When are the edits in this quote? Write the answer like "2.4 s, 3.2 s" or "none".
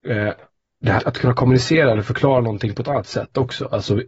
1.0 s